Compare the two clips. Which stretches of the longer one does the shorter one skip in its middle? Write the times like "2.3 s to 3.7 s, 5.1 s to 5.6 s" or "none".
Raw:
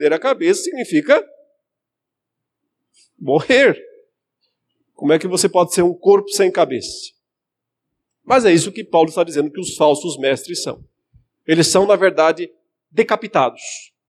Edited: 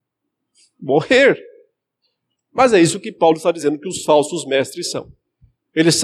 4.7 s to 8.1 s